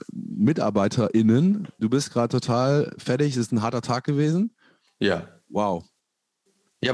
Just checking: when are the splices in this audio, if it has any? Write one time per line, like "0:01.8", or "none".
0:01.8